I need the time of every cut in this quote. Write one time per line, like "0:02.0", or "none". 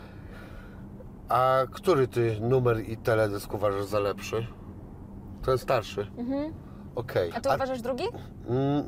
0:05.4
0:07.3